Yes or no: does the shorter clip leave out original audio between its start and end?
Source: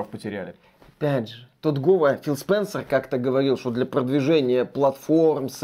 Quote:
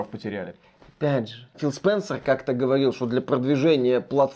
yes